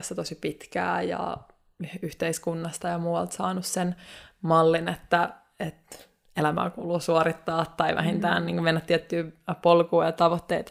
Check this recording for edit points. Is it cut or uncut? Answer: uncut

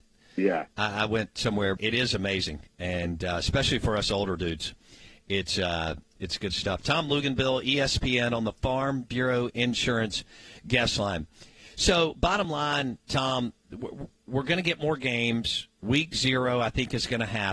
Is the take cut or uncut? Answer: cut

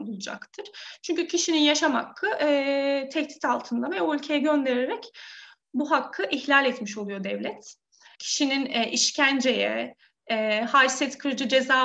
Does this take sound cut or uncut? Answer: cut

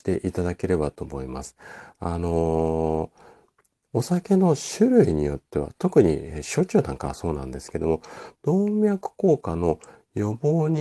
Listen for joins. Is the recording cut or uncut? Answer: uncut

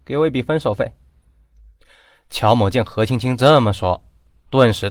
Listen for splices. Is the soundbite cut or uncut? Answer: uncut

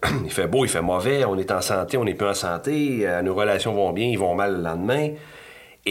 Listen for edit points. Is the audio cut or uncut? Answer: uncut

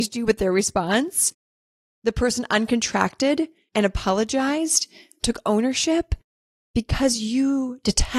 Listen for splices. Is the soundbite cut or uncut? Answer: uncut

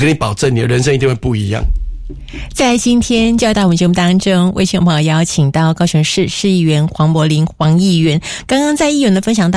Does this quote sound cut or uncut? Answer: uncut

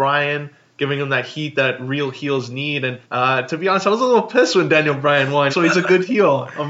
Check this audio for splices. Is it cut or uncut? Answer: cut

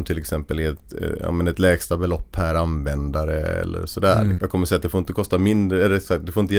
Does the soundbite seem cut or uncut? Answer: cut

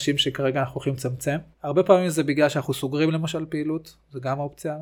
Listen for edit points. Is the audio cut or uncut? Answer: cut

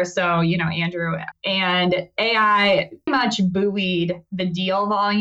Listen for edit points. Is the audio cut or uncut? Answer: cut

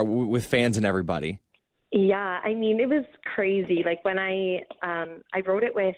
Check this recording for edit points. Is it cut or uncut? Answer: uncut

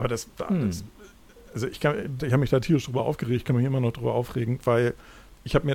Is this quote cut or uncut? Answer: cut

